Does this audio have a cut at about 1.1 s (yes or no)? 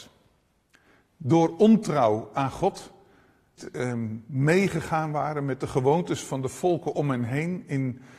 no